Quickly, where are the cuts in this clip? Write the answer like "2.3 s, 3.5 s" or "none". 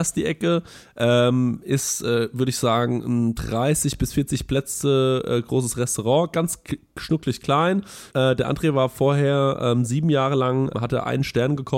8.1 s, 10.7 s